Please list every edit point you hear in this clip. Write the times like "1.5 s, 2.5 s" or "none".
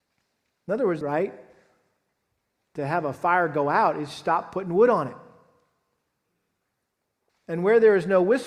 1.0 s, 7.3 s

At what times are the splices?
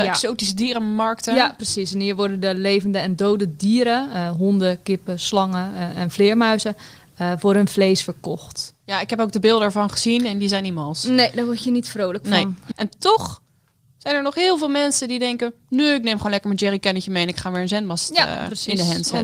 12.7 s

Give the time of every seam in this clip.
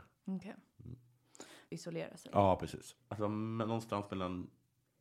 1.7 s, 3.0 s

